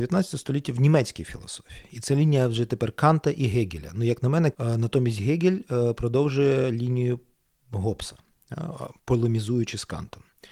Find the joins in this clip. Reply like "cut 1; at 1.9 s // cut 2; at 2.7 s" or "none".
cut 1; at 4.5 s // cut 2; at 9.0 s